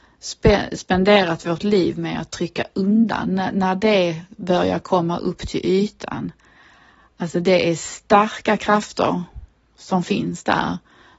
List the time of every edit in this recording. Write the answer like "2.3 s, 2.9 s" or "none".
none